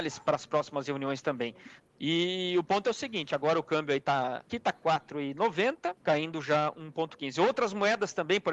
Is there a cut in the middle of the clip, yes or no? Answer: yes